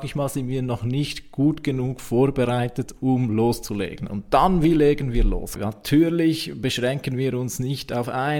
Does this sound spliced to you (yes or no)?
yes